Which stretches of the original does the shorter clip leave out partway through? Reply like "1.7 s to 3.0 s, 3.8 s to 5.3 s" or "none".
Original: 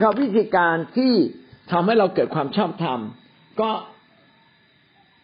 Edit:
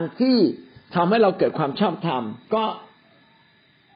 3.2 s to 3.5 s